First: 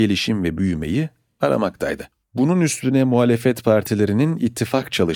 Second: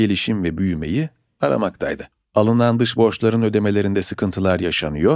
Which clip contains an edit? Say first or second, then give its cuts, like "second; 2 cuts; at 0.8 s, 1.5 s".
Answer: first; 1 cut; at 2.2 s